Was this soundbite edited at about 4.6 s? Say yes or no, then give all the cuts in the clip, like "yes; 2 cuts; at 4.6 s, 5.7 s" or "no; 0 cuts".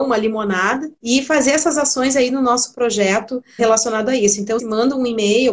yes; 3 cuts; at 1.0 s, 3.6 s, 4.6 s